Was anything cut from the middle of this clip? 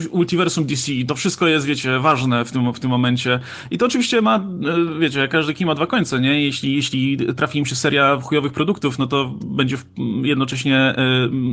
no; 0 cuts

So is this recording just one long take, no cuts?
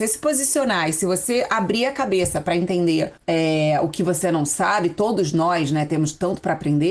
no; 1 cut; at 3.2 s

